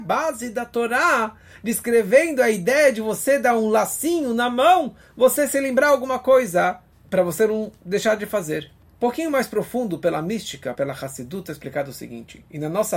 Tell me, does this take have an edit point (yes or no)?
no